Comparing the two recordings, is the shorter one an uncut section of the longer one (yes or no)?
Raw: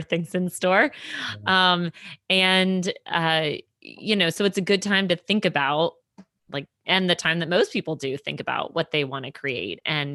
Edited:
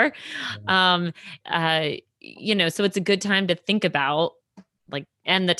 no